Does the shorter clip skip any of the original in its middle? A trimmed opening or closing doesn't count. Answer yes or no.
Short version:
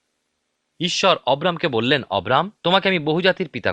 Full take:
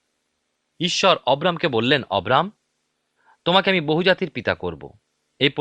yes